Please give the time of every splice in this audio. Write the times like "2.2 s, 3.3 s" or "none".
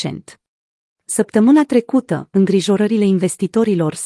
0.9 s